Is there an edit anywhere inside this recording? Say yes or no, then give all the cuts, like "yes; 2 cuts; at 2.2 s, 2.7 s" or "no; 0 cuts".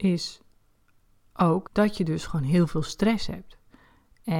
yes; 1 cut; at 1.6 s